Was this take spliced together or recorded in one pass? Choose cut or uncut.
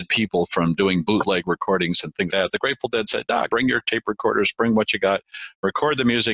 cut